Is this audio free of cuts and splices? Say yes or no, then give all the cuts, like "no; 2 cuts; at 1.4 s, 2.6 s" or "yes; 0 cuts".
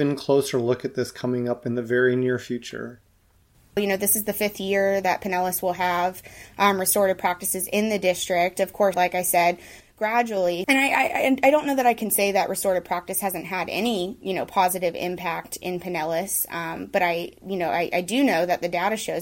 no; 3 cuts; at 3.8 s, 8.9 s, 10.6 s